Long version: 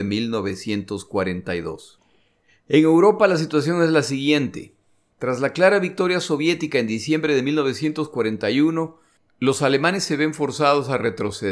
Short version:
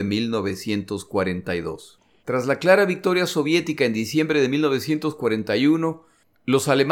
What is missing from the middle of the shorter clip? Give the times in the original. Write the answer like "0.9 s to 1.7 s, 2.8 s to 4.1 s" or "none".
2.2 s to 5.1 s